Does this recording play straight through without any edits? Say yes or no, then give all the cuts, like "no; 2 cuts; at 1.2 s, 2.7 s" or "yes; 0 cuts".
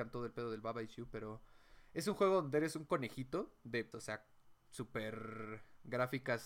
no; 1 cut; at 3.9 s